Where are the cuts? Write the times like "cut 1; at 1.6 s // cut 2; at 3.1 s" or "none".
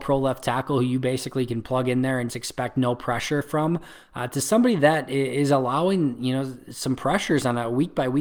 cut 1; at 2.3 s

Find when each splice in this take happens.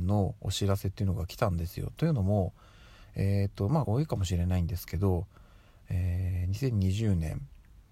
cut 1; at 3.8 s

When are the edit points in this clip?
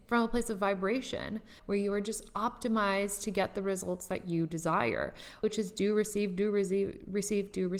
cut 1; at 1.6 s // cut 2; at 5.4 s

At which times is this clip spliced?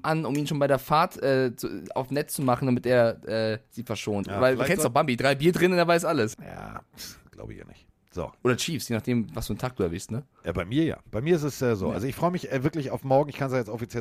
cut 1; at 4.2 s // cut 2; at 6.3 s

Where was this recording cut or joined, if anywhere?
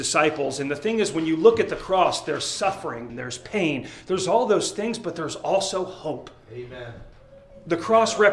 cut 1; at 3.1 s

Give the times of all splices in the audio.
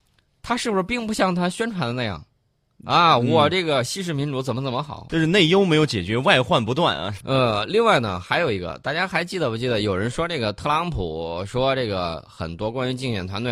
cut 1; at 5.1 s // cut 2; at 7.2 s

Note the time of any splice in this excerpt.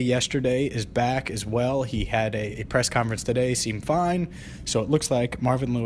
none

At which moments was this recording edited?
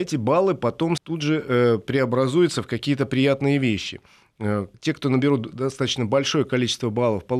cut 1; at 1.0 s // cut 2; at 4.7 s

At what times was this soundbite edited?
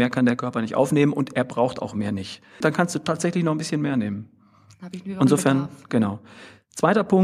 cut 1; at 2.6 s

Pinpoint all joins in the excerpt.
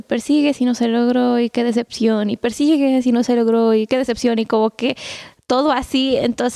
none

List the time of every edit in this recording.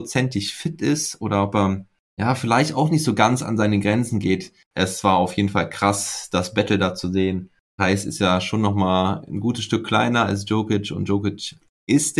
cut 1; at 4.7 s

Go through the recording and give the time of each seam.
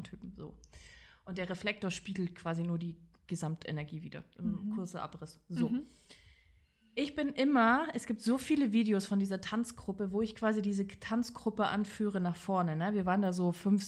none

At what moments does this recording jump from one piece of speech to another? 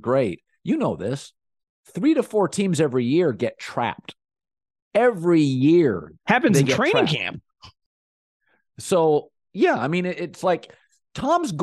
none

